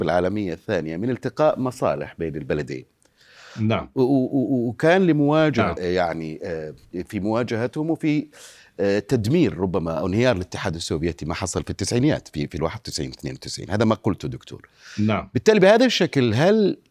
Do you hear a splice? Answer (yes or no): yes